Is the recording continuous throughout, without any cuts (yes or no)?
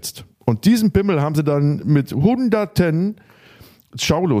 yes